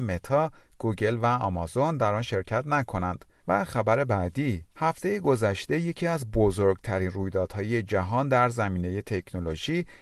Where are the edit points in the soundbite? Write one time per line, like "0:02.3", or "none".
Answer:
0:03.4
0:04.7